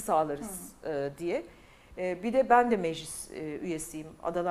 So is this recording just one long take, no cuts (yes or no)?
yes